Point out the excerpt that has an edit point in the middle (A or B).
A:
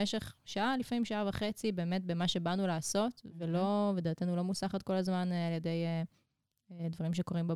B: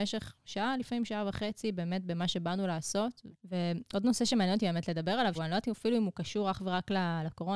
B